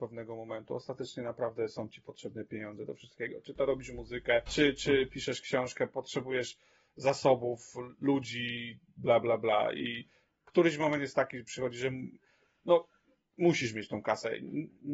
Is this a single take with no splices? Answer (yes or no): no